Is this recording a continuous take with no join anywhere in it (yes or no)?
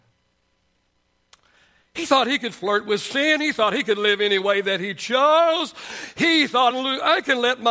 no